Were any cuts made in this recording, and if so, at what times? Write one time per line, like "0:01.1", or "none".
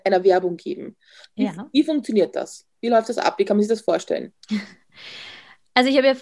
none